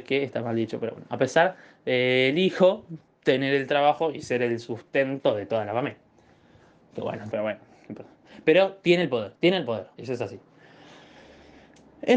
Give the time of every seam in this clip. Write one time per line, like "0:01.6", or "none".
0:07.3
0:09.9